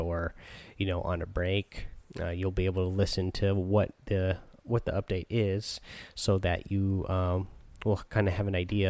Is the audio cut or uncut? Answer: uncut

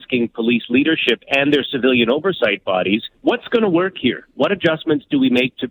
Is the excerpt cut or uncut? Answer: cut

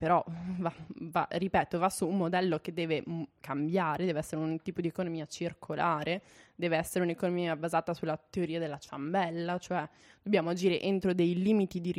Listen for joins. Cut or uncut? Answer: uncut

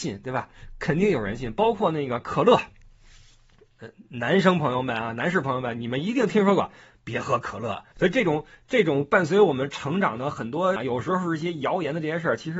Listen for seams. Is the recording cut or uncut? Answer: cut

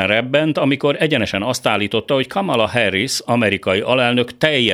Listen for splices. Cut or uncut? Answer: uncut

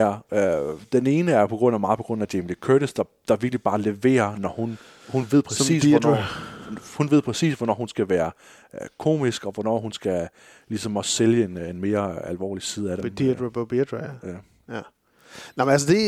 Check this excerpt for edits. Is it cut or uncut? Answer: cut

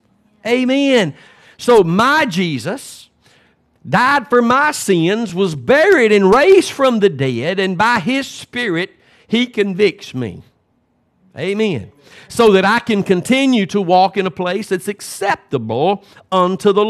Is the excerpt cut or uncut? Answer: uncut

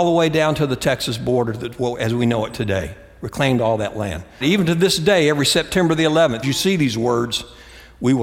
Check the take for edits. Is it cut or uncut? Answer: cut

